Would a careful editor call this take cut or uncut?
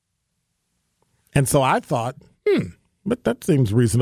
uncut